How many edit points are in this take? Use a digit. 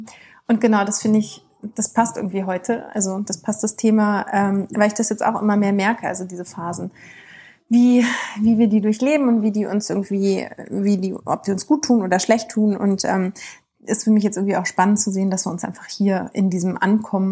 0